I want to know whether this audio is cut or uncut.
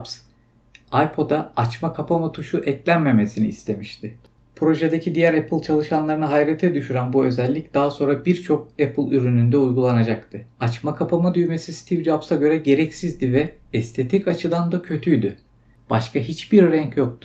cut